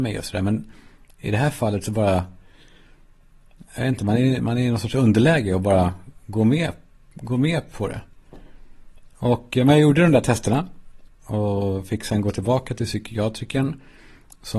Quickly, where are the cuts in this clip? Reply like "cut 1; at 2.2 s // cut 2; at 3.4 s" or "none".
cut 1; at 11.1 s